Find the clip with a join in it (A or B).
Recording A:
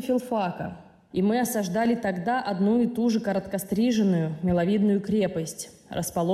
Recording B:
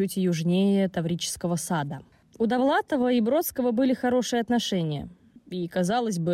A